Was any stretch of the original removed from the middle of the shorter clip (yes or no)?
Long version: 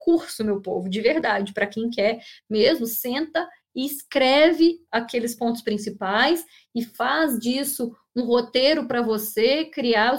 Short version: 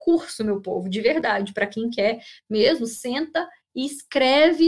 no